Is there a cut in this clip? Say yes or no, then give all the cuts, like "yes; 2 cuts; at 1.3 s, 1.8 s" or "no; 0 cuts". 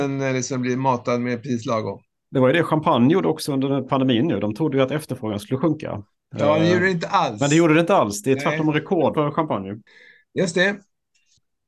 yes; 1 cut; at 9.1 s